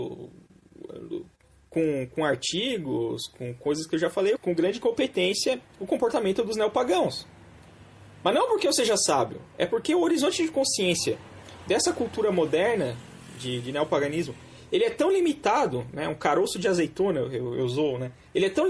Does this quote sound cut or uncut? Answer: cut